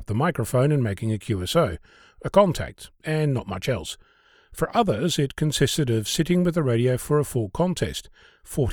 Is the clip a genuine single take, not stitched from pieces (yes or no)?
yes